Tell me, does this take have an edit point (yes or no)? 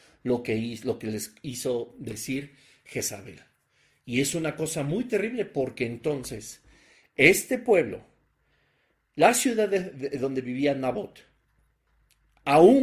no